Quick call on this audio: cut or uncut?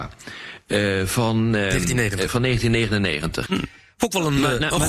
cut